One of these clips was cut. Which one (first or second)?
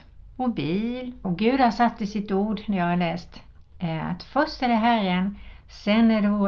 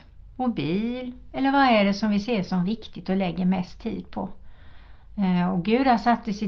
first